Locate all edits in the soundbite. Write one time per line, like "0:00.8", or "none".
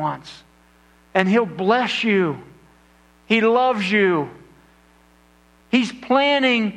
0:05.6